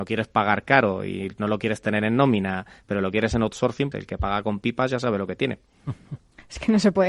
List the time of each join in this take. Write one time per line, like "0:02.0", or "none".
0:03.9

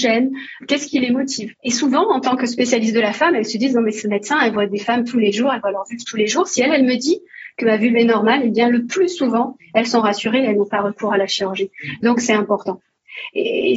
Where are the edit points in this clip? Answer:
0:01.6

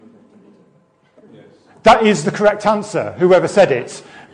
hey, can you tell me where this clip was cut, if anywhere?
0:01.3

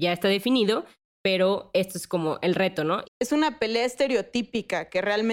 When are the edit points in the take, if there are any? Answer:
0:03.0

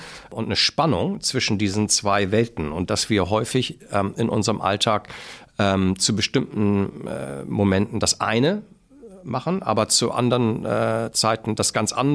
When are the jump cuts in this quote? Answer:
none

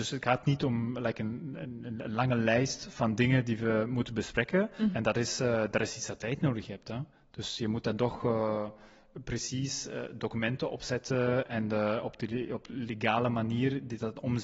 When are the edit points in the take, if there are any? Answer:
0:04.9

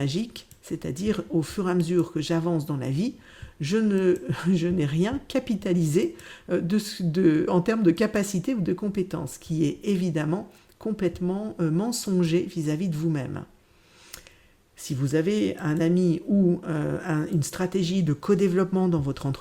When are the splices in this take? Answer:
none

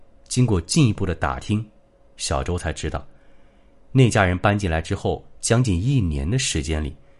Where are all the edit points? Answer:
none

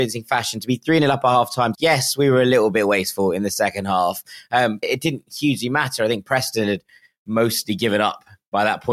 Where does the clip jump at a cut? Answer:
0:01.7
0:04.8

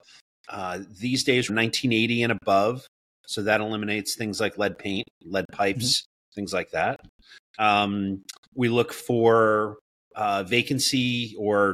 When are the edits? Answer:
0:01.5

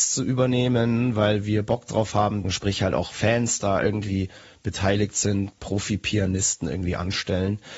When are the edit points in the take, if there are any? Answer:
0:02.4
0:05.6

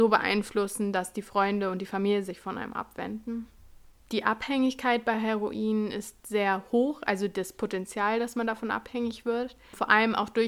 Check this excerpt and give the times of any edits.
none

